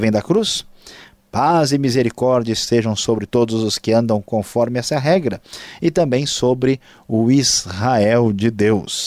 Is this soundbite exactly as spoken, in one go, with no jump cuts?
yes; 0 cuts

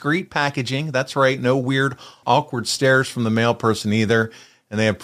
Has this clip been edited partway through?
yes; 1 cut; at 2.2 s

